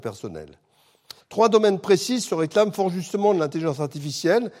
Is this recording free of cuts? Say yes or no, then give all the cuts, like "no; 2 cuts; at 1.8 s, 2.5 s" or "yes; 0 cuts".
no; 1 cut; at 1.2 s